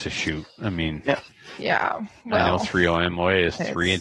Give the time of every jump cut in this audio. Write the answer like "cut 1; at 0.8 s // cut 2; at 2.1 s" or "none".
none